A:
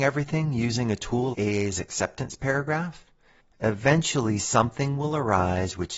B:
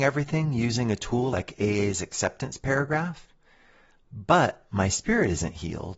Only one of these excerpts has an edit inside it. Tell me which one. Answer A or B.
A